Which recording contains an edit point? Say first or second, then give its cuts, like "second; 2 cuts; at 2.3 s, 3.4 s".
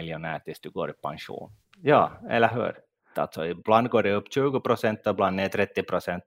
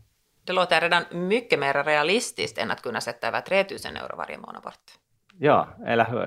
first; 2 cuts; at 1.6 s, 3.1 s